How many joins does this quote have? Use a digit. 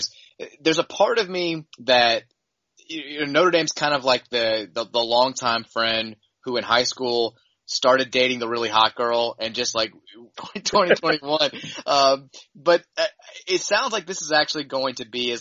2